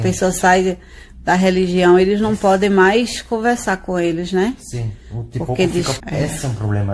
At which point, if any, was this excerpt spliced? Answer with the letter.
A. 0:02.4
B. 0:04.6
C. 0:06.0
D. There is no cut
C